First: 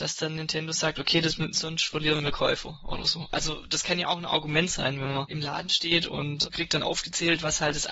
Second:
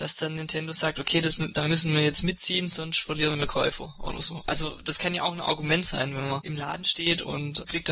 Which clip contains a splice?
first; 1 cut; at 1.5 s

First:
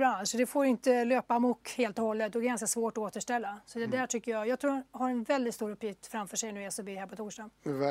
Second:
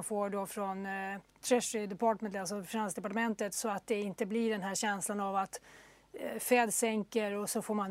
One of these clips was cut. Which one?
second; 1 cut; at 1.3 s

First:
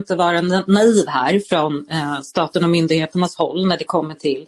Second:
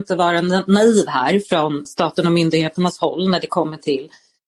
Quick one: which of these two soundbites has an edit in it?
second; 1 cut; at 1.9 s

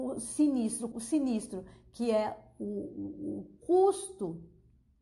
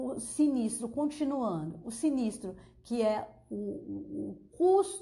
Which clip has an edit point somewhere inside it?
first; 1 cut; at 0.9 s

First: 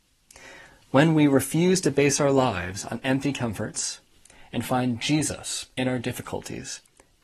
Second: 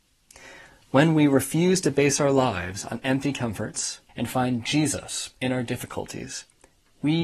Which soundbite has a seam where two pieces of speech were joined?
second; 1 cut; at 4.1 s

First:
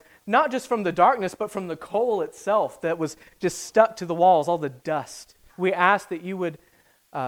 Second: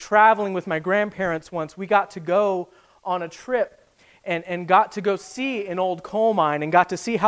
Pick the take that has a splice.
first; 1 cut; at 5.5 s

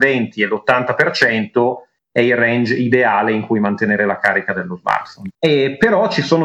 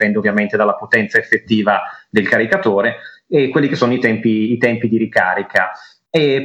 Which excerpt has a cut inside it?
first; 1 cut; at 5.3 s

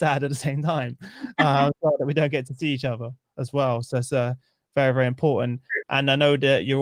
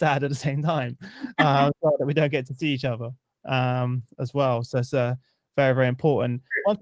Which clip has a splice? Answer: first; 2 cuts; at 3.3 s, 5.8 s

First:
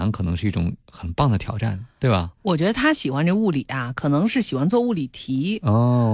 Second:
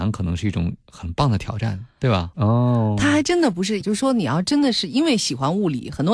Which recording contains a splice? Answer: second; 2 cuts; at 2.3 s, 3.8 s

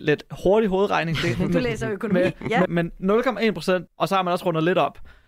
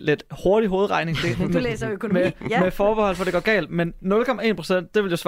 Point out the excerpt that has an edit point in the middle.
first; 2 cuts; at 2.7 s, 3.9 s

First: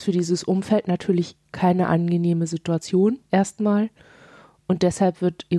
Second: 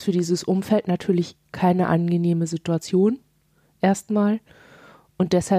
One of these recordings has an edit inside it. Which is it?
first; 1 cut; at 3.2 s

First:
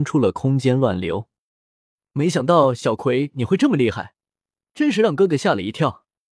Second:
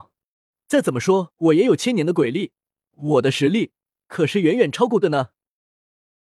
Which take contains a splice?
second; 2 cuts; at 2.8 s, 5.0 s

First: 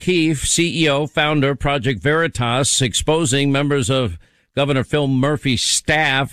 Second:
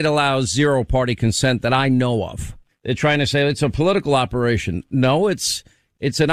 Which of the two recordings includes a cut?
second; 1 cut; at 2.7 s

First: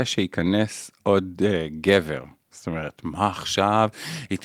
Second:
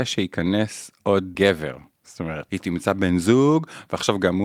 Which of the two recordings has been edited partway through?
second; 2 cuts; at 1.3 s, 2.5 s

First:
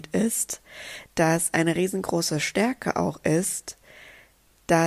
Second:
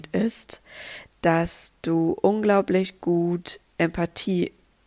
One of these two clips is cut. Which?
second; 1 cut; at 1.1 s

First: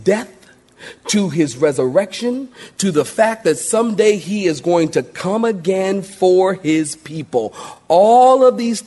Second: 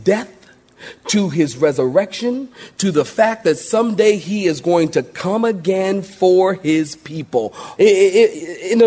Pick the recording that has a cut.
second; 1 cut; at 7.8 s

